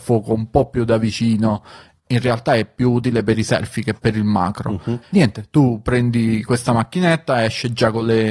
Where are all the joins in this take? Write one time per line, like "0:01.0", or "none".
0:05.0